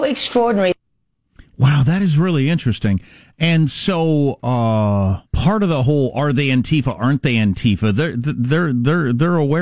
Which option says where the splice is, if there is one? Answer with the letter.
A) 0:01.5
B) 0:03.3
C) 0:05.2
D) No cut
C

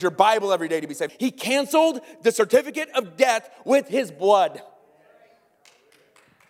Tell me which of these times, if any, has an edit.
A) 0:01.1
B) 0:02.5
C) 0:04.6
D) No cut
A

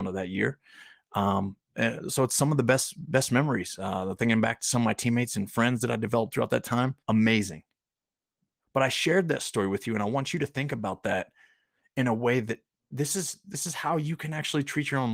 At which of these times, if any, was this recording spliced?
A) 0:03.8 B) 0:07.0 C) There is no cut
B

